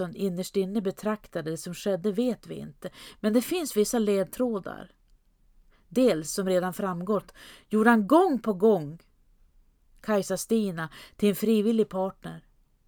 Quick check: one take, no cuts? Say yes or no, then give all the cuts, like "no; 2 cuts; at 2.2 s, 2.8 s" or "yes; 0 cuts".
yes; 0 cuts